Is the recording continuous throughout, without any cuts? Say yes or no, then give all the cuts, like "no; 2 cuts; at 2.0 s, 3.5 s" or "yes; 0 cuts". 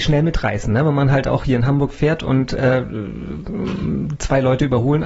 yes; 0 cuts